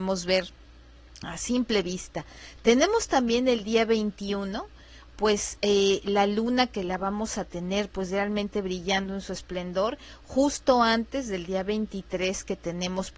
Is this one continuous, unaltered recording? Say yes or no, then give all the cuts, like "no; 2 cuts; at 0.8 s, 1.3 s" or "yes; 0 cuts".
yes; 0 cuts